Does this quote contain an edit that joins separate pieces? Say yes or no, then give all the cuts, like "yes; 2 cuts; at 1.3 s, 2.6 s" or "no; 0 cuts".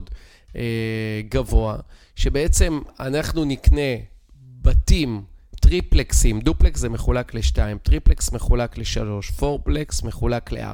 yes; 1 cut; at 5.5 s